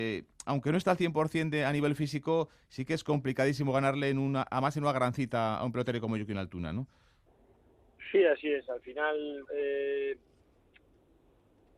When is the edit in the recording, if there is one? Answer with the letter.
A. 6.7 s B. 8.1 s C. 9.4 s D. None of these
C